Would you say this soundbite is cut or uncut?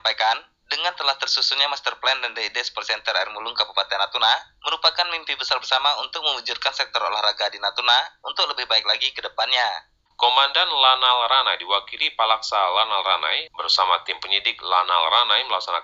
cut